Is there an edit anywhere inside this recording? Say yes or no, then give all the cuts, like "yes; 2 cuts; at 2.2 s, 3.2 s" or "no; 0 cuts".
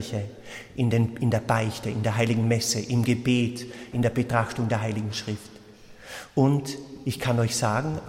yes; 1 cut; at 3.9 s